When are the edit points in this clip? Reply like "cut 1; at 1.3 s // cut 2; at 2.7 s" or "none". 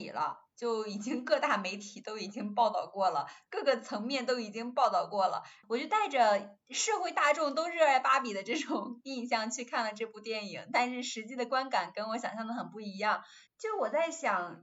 cut 1; at 13.5 s